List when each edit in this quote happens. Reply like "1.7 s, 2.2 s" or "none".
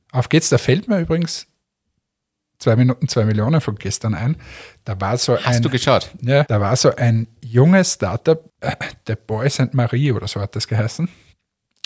6.5 s, 8.5 s